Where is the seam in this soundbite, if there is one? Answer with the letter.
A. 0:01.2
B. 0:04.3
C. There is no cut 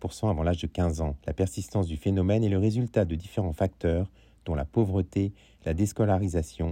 A